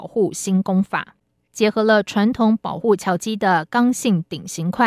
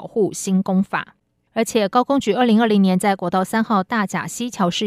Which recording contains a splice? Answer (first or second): second